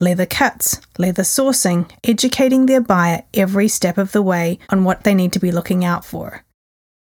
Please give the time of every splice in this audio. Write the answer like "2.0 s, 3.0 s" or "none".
2.0 s, 4.6 s